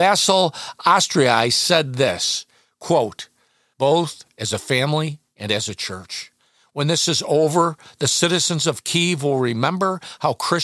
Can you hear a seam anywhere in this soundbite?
yes; 1 cut; at 3.7 s

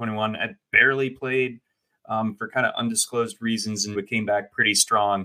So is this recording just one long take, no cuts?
no; 1 cut; at 3.9 s

